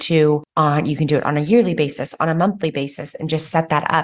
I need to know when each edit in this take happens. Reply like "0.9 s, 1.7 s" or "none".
none